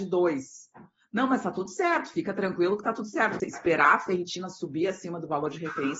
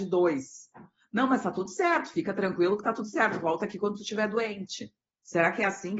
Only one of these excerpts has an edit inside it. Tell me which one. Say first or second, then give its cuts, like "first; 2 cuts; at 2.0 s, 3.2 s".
first; 1 cut; at 3.4 s